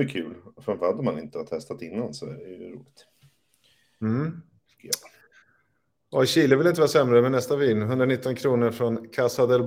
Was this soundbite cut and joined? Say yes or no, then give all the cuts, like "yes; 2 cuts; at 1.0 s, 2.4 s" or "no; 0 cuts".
no; 0 cuts